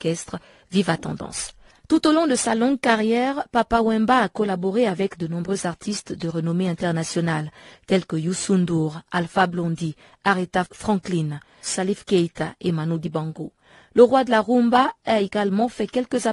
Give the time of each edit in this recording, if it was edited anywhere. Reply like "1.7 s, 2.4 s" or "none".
11.6 s